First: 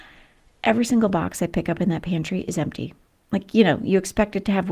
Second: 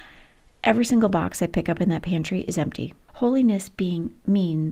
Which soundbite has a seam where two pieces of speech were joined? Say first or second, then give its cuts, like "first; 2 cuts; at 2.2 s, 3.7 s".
second; 1 cut; at 3.1 s